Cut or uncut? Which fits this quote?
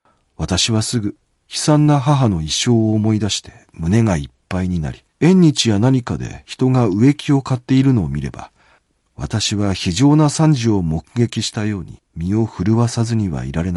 cut